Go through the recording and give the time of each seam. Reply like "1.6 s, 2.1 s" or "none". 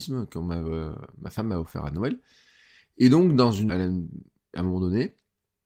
3.7 s